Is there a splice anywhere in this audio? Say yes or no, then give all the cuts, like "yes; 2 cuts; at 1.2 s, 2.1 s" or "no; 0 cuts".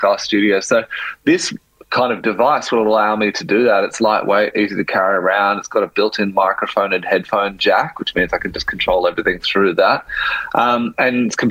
no; 0 cuts